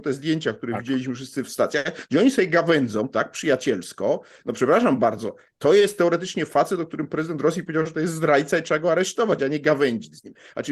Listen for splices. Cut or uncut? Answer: uncut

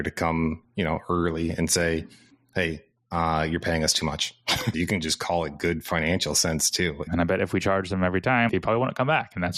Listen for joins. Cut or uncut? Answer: cut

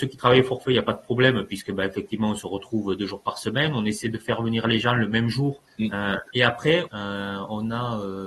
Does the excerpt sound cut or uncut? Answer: cut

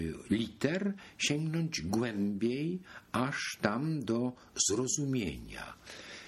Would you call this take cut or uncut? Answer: uncut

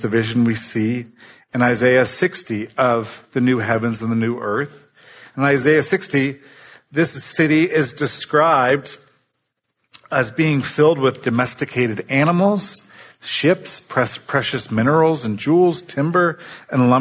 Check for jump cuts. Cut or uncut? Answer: uncut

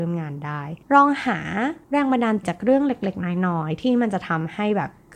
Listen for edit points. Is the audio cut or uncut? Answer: cut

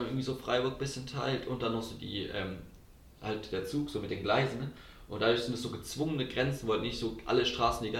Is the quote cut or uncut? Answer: uncut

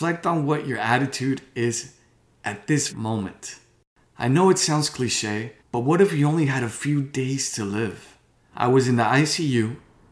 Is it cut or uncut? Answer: cut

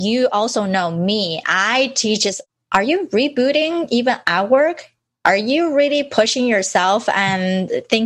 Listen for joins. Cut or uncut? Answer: uncut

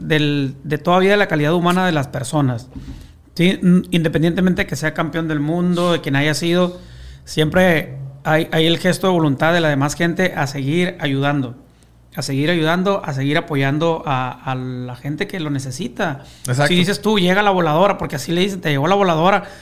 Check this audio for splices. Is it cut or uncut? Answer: uncut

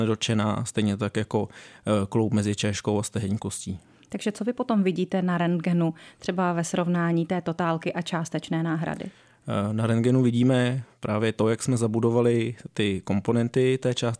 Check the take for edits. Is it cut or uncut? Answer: uncut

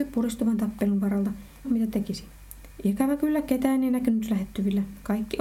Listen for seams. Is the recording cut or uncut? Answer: cut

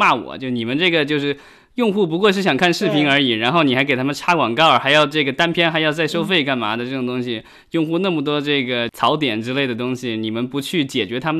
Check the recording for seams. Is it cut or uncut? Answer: uncut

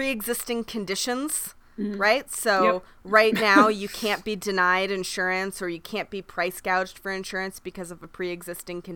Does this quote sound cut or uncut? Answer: uncut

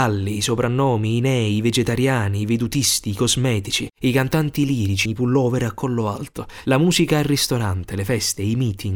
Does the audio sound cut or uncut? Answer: cut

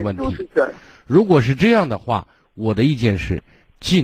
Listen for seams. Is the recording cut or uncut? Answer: uncut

